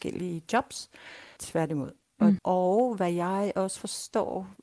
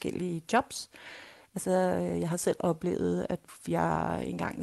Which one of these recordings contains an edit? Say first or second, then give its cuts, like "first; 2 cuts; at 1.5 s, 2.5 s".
first; 2 cuts; at 1.4 s, 2.4 s